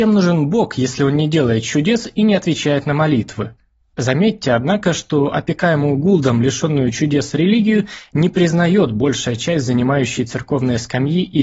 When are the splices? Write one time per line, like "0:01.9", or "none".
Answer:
0:03.9

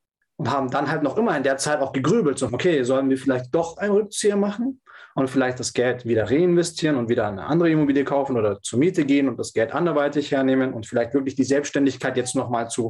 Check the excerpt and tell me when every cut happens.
0:02.5

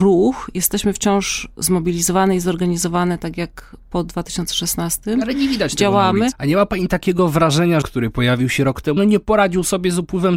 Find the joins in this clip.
0:06.3
0:07.8
0:09.0

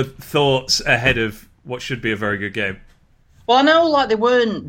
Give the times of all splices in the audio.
none

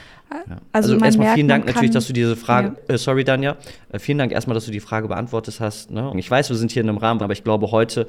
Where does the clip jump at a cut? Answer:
0:06.1
0:07.2

